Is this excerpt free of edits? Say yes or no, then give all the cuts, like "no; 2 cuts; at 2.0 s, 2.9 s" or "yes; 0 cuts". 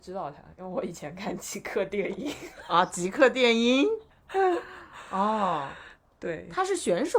yes; 0 cuts